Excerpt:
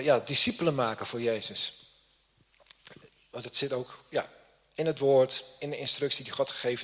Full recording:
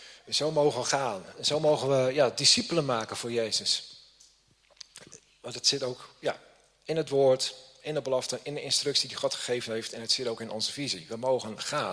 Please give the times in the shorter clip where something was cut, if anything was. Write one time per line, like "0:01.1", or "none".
0:05.6